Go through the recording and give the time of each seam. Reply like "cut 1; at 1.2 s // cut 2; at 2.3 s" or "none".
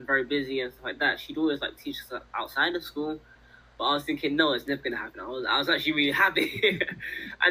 none